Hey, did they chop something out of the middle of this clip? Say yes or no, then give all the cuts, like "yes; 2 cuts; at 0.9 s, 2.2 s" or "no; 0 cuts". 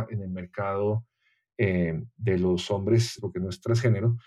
yes; 1 cut; at 3.2 s